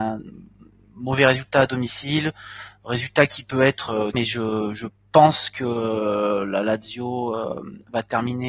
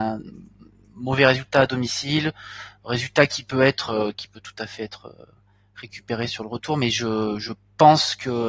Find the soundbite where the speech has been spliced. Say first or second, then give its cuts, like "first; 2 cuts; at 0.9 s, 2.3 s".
first; 1 cut; at 4.1 s